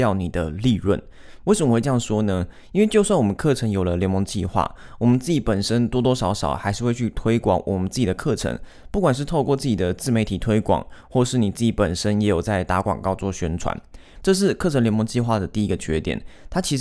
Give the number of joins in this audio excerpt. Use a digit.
1